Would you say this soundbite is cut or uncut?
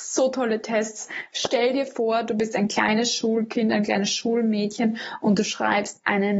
uncut